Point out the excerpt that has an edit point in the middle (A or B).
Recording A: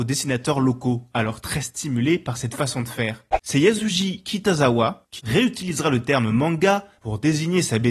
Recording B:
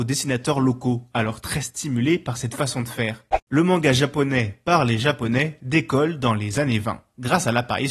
A